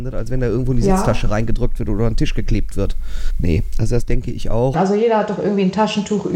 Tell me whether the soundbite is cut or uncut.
cut